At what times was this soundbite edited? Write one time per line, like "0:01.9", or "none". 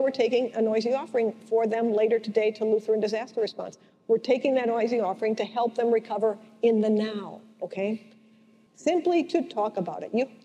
0:08.7